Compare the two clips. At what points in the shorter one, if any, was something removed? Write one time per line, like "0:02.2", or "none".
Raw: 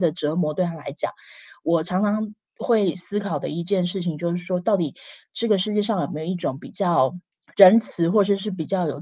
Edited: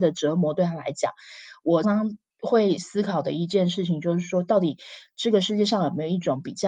0:01.8

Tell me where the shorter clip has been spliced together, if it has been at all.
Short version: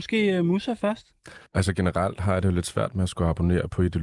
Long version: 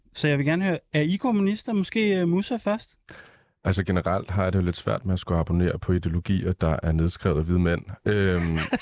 0:01.5

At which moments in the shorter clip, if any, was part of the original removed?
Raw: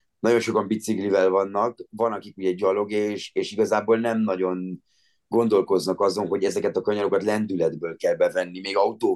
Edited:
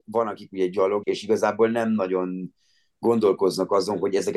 0:01.0

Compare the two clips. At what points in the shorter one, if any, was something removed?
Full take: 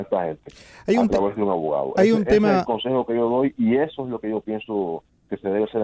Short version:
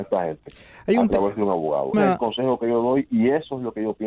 0:01.9

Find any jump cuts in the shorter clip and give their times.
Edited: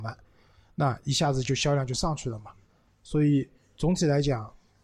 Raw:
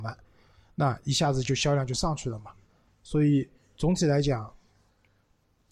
none

